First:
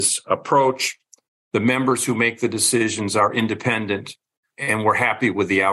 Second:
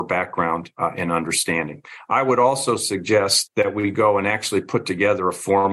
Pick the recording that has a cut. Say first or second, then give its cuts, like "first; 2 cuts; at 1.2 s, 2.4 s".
second; 1 cut; at 3.5 s